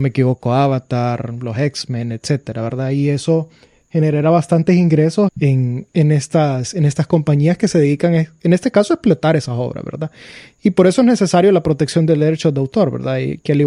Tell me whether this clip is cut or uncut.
cut